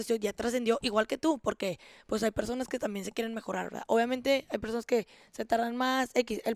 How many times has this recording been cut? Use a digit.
0